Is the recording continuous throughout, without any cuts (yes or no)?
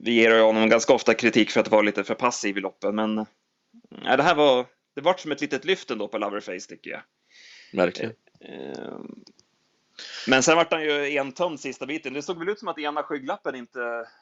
yes